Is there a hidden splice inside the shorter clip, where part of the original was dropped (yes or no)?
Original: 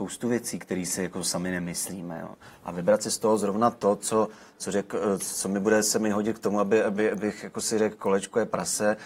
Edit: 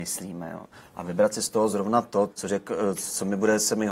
yes